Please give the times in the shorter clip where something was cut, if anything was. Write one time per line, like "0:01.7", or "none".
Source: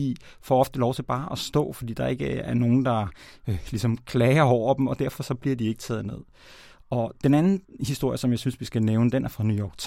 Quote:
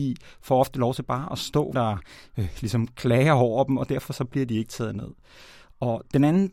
0:01.7